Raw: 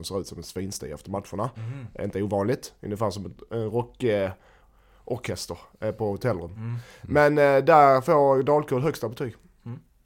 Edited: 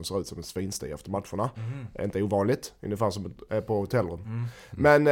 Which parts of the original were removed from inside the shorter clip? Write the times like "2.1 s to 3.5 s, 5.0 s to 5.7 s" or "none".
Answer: 3.5 s to 5.8 s